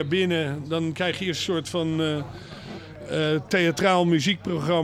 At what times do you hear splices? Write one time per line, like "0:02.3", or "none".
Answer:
none